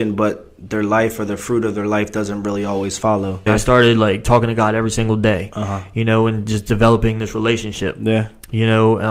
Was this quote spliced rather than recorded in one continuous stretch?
yes; 1 cut; at 3.5 s

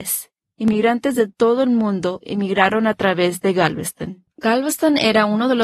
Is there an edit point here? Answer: yes; 1 cut; at 4.3 s

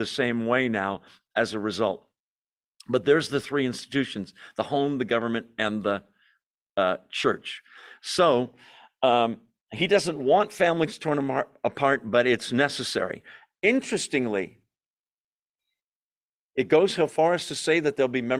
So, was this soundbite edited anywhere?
no; 0 cuts

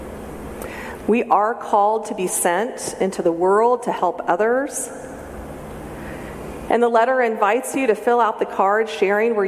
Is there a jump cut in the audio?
yes; 2 cuts; at 1.0 s, 6.7 s

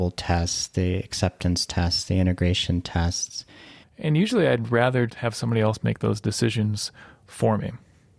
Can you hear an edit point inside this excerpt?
yes; 2 cuts; at 3.8 s, 5.1 s

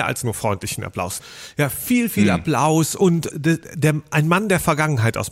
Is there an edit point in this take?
yes; 2 cuts; at 1.2 s, 3.3 s

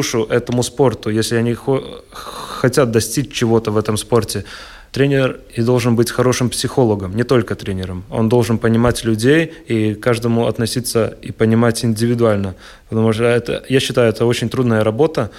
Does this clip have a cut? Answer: no; 0 cuts

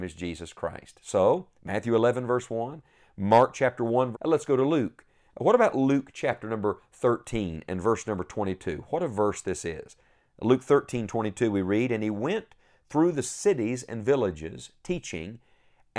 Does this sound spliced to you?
yes; 1 cut; at 4.1 s

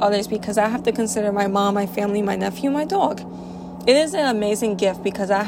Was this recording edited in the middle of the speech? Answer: no; 0 cuts

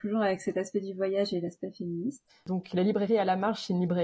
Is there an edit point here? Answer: yes; 1 cut; at 2.3 s

